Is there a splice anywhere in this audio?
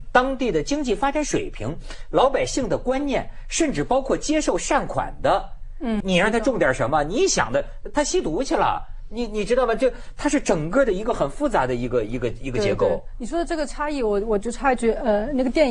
yes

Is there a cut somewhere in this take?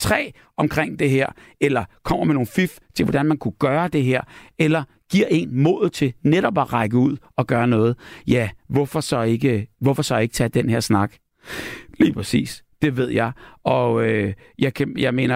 yes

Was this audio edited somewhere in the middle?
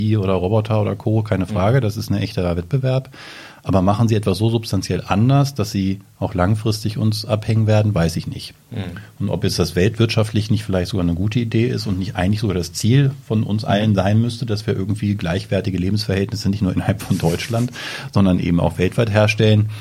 no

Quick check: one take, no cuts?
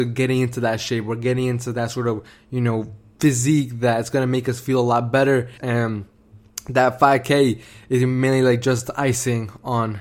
no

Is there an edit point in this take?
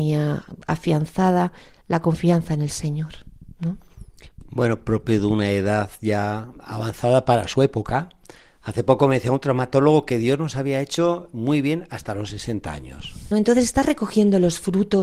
yes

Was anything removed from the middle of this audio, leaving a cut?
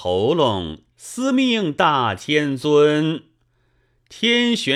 yes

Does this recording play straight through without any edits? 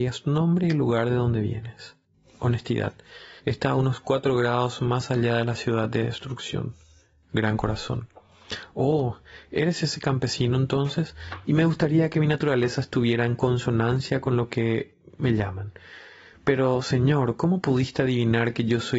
no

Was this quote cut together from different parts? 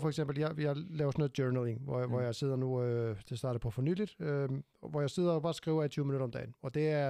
no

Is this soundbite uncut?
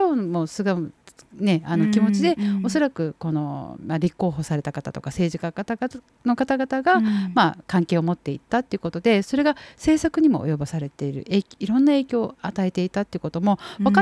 yes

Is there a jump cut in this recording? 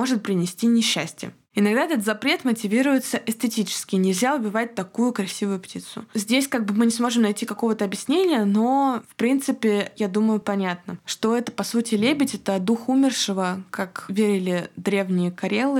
no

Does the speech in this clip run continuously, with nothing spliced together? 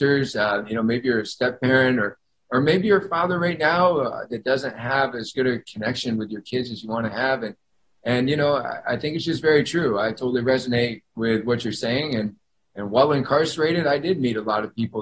yes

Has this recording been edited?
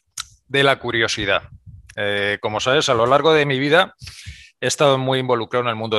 yes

